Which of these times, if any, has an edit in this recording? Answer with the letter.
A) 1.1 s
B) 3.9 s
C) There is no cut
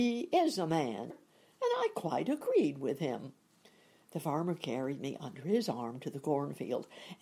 A